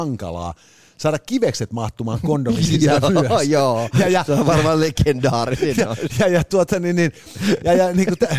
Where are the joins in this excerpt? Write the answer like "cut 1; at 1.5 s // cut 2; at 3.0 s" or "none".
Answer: none